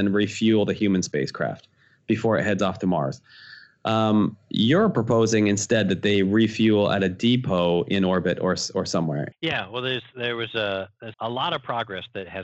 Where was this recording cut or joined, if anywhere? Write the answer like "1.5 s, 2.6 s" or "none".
9.3 s, 11.1 s